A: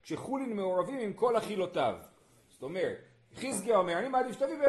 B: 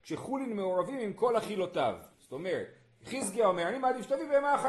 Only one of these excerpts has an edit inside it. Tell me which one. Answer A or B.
B